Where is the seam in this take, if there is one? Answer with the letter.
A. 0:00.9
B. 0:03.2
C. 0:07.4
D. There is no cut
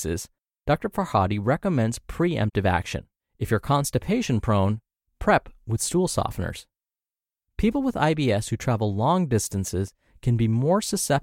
B